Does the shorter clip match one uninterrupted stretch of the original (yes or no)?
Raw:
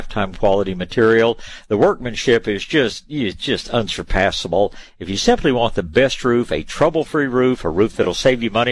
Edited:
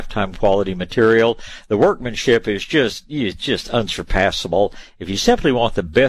yes